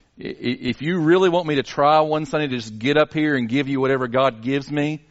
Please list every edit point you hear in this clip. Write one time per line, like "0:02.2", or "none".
none